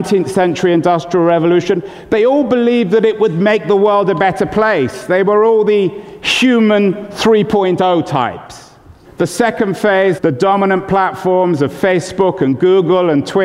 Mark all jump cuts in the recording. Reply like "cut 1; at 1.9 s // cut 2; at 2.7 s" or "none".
cut 1; at 9.0 s // cut 2; at 10.2 s